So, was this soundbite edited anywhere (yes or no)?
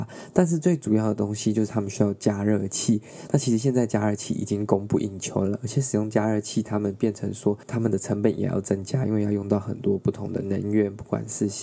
no